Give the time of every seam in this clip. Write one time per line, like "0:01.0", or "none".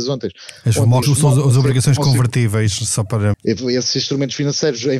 0:01.0
0:03.3